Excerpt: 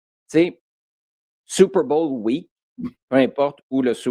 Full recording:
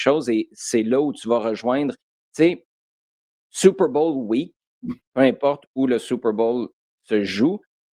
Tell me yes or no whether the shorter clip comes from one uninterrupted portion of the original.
yes